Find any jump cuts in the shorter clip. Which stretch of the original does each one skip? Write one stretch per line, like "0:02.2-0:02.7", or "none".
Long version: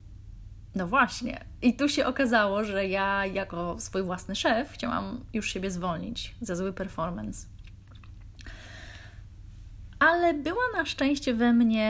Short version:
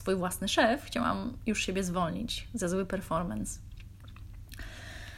none